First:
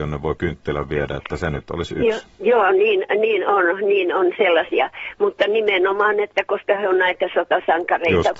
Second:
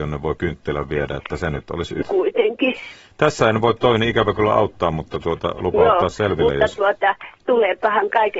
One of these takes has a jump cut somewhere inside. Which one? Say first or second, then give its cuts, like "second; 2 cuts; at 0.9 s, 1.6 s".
second; 1 cut; at 2.0 s